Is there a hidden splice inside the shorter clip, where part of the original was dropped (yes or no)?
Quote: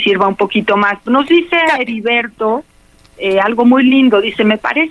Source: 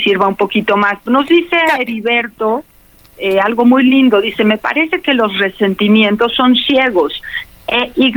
no